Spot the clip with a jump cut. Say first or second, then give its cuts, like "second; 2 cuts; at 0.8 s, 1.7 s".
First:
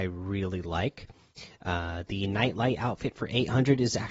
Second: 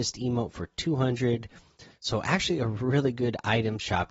second; 1 cut; at 1.9 s